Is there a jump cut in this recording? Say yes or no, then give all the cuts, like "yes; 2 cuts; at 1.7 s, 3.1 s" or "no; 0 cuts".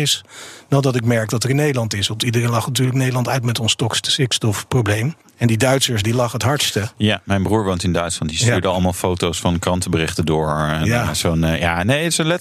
yes; 1 cut; at 6.0 s